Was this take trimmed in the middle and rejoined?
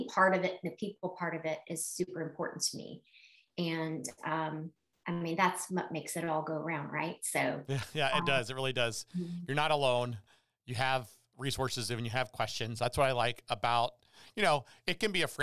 no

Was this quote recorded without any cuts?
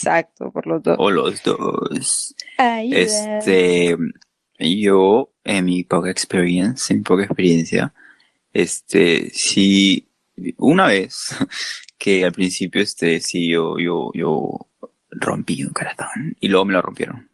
yes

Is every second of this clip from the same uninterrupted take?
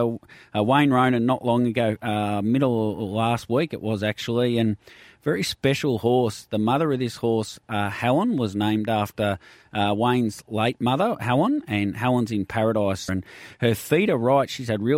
no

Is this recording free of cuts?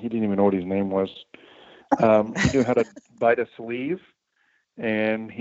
yes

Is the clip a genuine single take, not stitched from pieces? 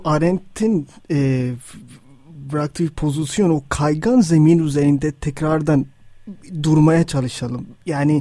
yes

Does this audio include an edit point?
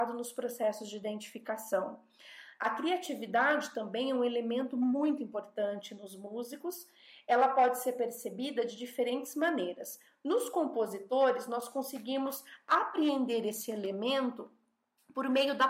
no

